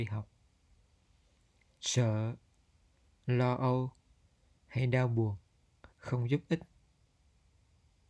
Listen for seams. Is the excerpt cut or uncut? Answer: cut